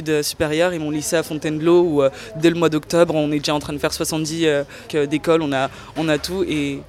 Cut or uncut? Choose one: cut